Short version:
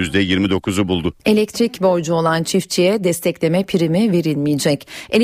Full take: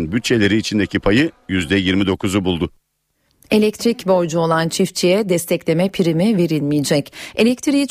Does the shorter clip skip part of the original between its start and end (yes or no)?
yes